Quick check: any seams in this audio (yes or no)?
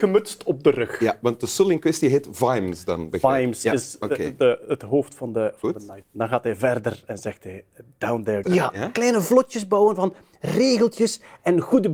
yes